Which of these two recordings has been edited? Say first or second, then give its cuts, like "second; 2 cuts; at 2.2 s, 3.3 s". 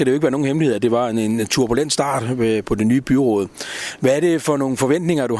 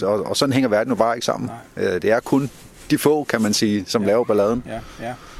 first; 1 cut; at 2.6 s